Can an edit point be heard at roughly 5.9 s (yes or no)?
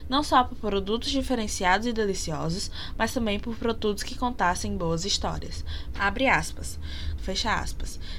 yes